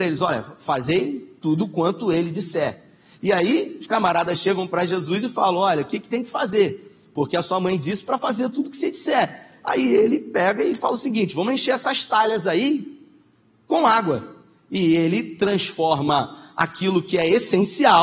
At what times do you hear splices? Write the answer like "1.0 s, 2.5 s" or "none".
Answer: none

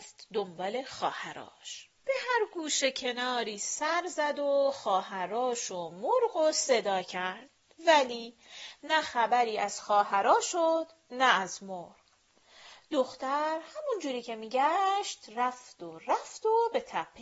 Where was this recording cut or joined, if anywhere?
2.0 s

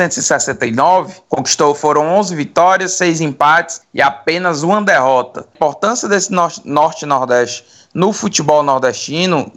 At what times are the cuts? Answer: 1.3 s, 5.5 s

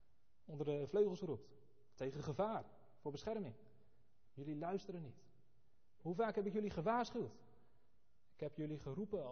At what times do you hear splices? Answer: 4.3 s, 6.0 s

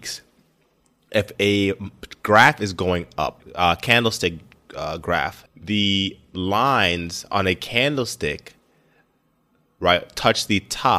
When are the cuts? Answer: 5.5 s

